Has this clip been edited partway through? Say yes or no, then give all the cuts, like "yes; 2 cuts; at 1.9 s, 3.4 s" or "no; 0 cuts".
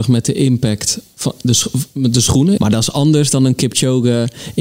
yes; 1 cut; at 2.6 s